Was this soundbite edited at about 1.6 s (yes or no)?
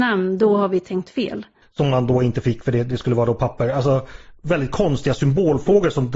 yes